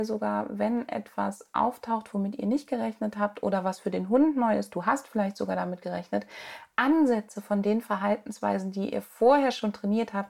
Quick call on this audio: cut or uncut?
uncut